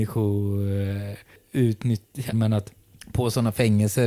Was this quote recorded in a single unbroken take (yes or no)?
no